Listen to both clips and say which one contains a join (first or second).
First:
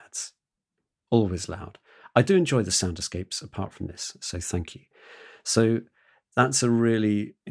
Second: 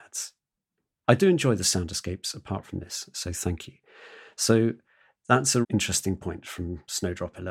second